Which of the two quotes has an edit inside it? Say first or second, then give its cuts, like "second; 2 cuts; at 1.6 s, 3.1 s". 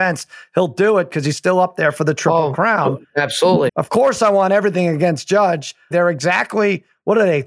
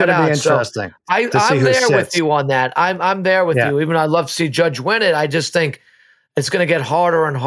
first; 2 cuts; at 3.7 s, 5.9 s